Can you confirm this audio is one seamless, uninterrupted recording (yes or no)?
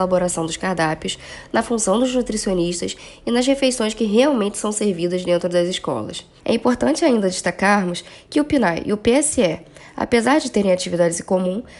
no